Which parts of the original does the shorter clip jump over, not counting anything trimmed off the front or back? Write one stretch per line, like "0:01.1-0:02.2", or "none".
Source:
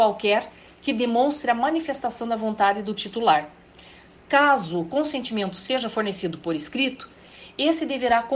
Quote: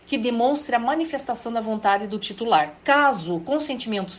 0:03.5-0:04.2